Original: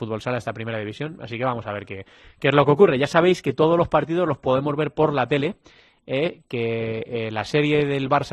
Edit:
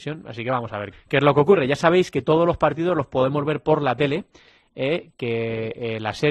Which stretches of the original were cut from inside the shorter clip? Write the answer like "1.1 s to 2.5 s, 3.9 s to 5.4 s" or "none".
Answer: 1.9 s to 2.2 s